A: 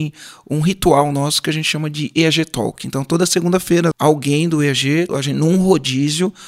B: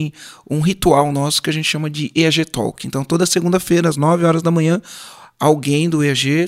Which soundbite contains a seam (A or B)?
A